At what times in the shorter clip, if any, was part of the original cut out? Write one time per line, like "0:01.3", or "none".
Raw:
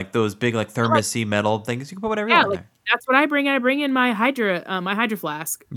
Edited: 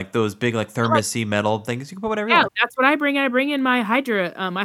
0:02.5